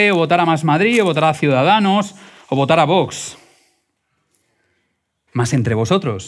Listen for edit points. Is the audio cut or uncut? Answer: cut